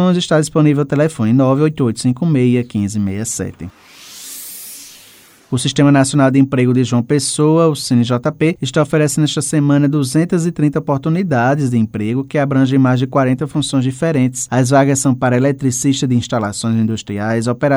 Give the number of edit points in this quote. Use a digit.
0